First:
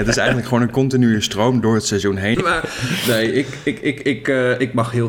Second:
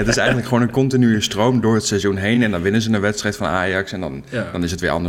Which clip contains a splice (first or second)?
first